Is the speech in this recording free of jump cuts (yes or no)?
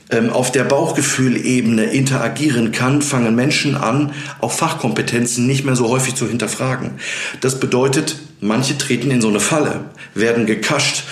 yes